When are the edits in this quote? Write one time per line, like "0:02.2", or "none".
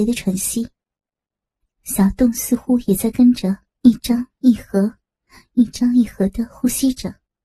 none